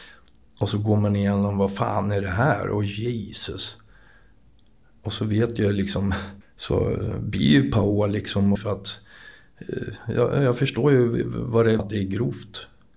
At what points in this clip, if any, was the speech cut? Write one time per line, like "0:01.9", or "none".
0:06.4
0:08.6
0:11.8